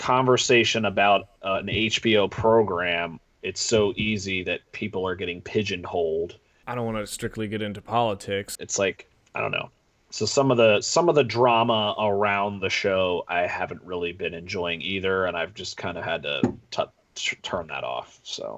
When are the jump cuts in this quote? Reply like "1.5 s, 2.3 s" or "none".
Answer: 6.6 s, 8.6 s